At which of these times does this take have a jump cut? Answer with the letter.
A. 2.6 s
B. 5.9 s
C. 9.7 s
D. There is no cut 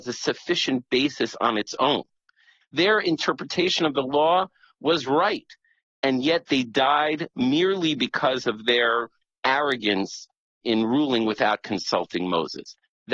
A